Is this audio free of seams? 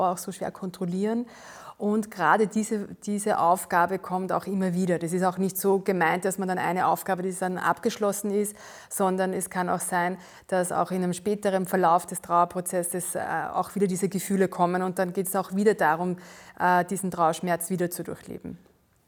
yes; 0 cuts

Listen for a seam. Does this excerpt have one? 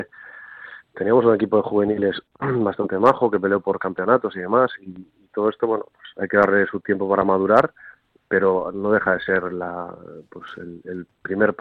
no; 0 cuts

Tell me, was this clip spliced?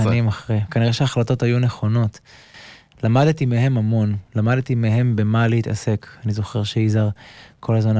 no; 0 cuts

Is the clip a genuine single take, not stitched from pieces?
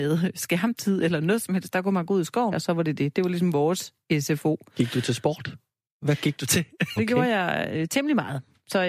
no; 3 cuts; at 2.5 s, 5.9 s, 7.0 s

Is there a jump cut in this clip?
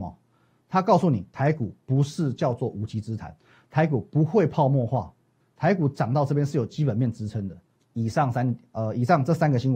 yes; 2 cuts; at 5.4 s, 7.8 s

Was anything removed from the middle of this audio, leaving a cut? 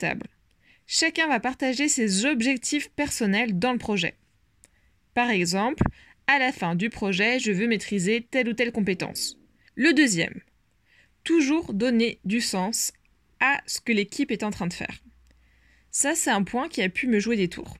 yes; 1 cut; at 9.7 s

